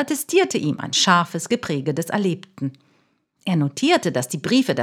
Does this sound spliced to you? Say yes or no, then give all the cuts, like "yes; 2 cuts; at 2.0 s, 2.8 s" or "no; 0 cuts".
no; 0 cuts